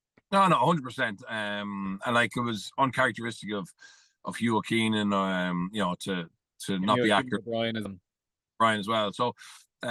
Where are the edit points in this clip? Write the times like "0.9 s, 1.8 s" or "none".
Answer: 7.8 s